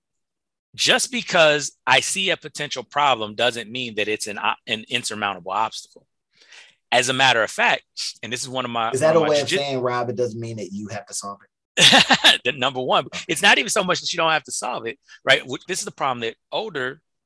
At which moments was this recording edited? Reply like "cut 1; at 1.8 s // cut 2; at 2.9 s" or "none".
cut 1; at 13.1 s // cut 2; at 15.7 s